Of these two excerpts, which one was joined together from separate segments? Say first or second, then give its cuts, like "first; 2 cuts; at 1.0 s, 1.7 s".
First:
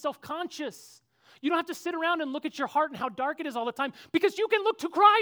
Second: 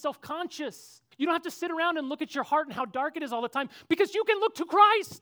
second; 1 cut; at 1.1 s